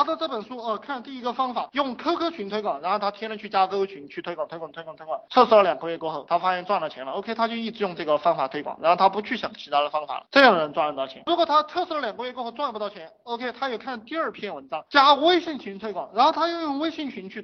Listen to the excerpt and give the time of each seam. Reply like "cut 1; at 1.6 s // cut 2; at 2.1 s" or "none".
none